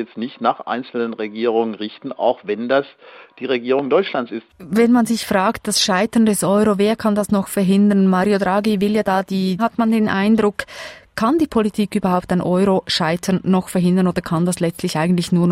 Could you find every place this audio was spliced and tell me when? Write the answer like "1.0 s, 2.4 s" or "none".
4.5 s, 9.6 s